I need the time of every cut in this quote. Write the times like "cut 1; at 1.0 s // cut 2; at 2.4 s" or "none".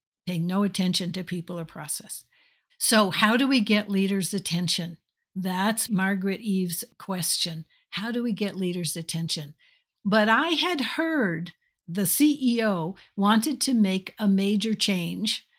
cut 1; at 2.7 s // cut 2; at 9.9 s